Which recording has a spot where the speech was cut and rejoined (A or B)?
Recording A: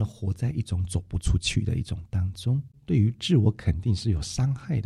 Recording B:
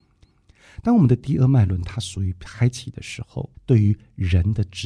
A